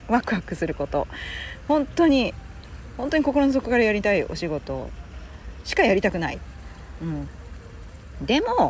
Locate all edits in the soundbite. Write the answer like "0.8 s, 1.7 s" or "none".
none